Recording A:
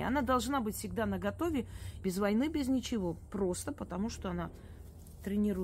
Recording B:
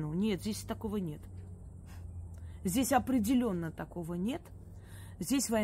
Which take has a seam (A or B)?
A